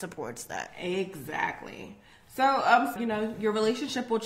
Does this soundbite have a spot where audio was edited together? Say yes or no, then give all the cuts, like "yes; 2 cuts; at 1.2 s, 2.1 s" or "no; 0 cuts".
yes; 1 cut; at 3.0 s